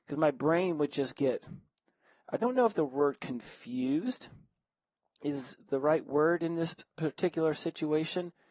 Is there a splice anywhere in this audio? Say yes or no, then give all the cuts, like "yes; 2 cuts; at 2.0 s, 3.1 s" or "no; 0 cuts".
no; 0 cuts